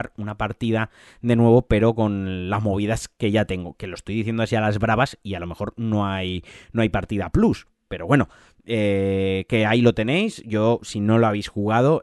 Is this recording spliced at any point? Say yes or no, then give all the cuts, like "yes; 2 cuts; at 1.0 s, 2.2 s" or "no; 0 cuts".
no; 0 cuts